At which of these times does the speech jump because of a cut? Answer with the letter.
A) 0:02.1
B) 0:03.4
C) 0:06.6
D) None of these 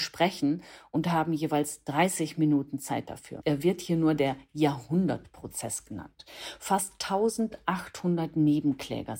B